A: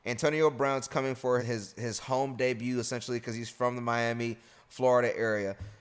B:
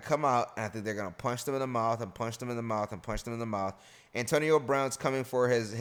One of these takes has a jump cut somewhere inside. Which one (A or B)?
A